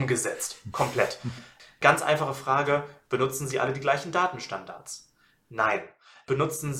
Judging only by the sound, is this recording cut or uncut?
uncut